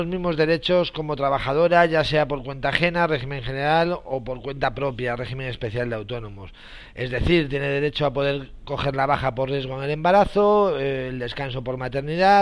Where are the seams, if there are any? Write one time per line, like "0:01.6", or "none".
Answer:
none